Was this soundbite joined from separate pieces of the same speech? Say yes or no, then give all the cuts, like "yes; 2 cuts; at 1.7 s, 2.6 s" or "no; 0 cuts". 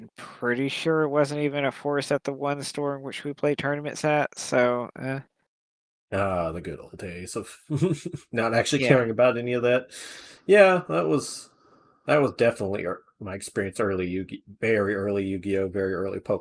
no; 0 cuts